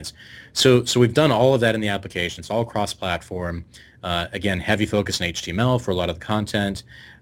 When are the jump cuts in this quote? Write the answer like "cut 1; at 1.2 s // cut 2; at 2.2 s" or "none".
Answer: none